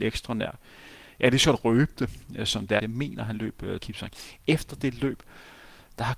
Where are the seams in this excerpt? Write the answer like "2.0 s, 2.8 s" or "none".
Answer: 2.8 s, 3.8 s